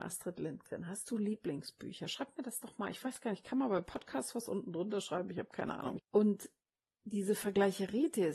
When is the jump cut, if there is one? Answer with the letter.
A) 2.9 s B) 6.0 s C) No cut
B